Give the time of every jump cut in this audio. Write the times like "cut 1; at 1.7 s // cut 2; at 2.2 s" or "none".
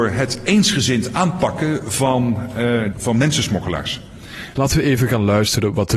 cut 1; at 2.9 s // cut 2; at 4.5 s